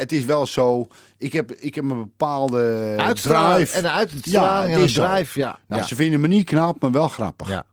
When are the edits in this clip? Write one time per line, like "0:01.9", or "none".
none